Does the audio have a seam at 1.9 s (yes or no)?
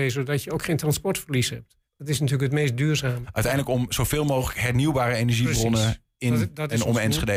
yes